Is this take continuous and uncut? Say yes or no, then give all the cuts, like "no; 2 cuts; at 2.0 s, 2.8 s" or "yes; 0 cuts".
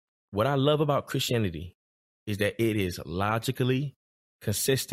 yes; 0 cuts